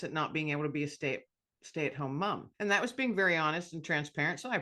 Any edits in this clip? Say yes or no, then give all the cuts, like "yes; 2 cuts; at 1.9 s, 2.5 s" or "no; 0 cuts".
yes; 1 cut; at 2.5 s